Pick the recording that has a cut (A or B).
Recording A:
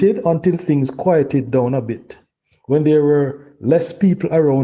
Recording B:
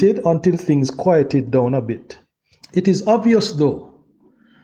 B